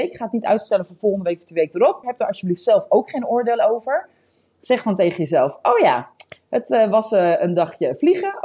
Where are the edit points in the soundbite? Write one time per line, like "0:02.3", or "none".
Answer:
0:02.0